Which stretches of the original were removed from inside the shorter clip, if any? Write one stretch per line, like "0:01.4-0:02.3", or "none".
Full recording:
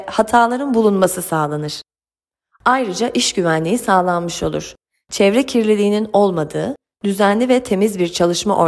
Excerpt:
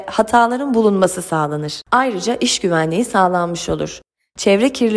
0:01.8-0:02.6